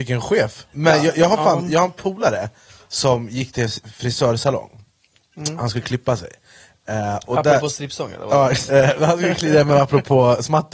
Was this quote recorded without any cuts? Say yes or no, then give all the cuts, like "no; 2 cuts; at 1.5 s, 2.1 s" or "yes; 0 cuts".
no; 1 cut; at 8.7 s